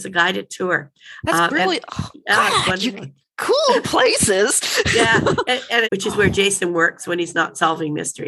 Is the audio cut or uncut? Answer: cut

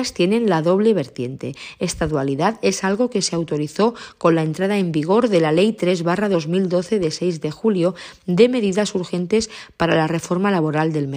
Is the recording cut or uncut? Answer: uncut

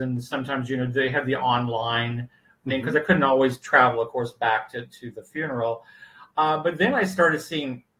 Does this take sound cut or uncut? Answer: uncut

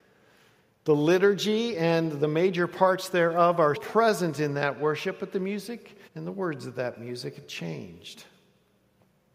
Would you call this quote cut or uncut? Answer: cut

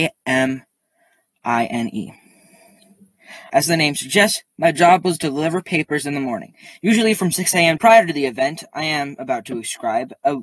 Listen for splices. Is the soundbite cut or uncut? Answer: cut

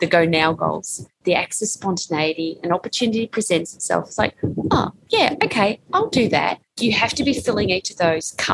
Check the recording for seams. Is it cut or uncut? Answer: cut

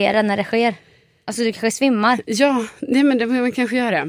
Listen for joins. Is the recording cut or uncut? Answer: uncut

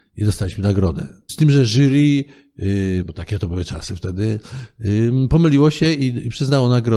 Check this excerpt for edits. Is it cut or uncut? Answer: cut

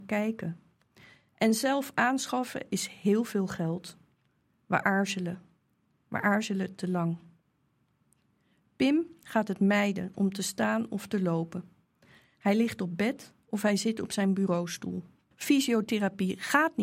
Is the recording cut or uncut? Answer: cut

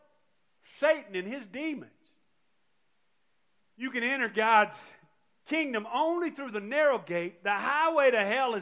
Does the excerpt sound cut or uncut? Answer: cut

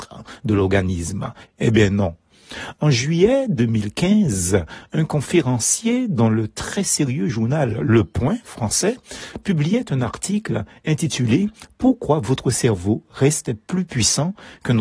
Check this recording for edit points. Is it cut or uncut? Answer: cut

